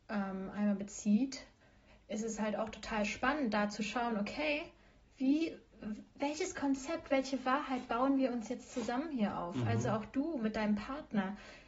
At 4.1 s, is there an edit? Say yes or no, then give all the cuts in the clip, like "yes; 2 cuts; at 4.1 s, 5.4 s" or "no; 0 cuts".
no; 0 cuts